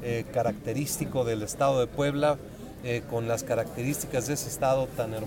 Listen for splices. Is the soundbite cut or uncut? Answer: cut